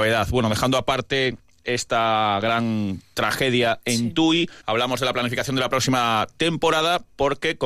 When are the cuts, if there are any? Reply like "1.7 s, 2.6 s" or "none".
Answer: 4.6 s